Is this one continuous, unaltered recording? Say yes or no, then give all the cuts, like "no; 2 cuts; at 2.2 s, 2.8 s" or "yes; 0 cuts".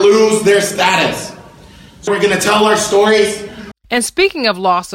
no; 2 cuts; at 2.1 s, 3.7 s